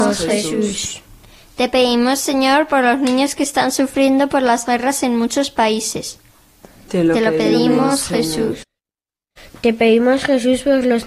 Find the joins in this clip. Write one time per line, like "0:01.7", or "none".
none